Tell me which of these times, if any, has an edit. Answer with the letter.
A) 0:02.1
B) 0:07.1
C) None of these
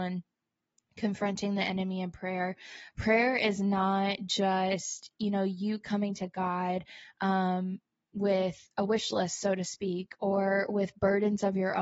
C